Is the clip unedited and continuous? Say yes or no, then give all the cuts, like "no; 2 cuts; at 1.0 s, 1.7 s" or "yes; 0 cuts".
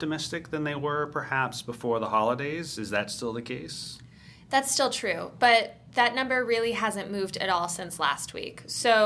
yes; 0 cuts